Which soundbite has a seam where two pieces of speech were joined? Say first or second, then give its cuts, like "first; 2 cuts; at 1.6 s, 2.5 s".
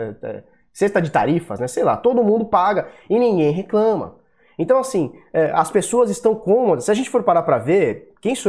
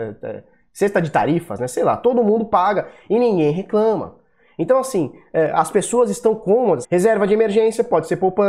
second; 1 cut; at 6.8 s